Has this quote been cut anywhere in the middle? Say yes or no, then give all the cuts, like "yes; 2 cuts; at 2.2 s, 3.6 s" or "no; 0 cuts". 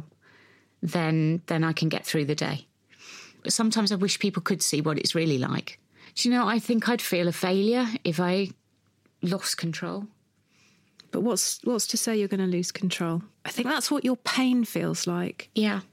yes; 1 cut; at 13.3 s